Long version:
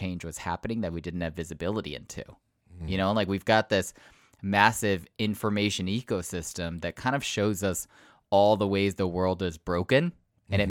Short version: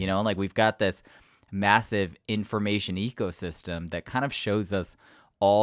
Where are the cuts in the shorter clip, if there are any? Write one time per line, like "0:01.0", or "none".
none